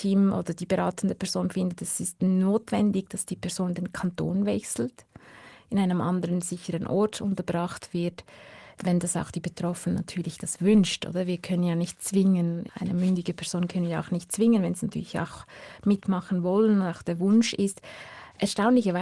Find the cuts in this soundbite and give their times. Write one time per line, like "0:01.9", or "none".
0:12.7